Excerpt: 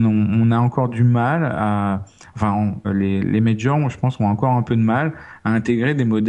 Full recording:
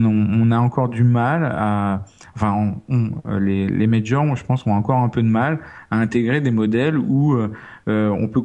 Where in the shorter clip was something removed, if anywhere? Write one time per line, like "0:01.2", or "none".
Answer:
0:02.8